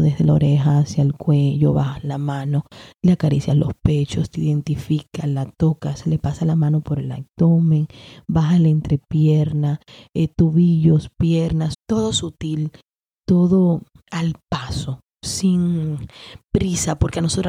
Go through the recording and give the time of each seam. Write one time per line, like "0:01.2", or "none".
0:11.7